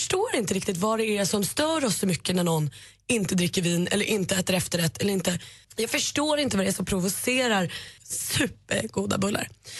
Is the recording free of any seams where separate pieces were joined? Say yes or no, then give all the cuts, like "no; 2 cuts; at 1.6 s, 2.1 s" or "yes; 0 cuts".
no; 2 cuts; at 5.6 s, 8.0 s